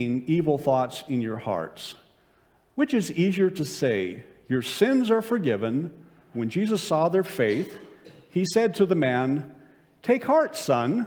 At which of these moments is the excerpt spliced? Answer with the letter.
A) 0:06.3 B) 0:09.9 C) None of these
A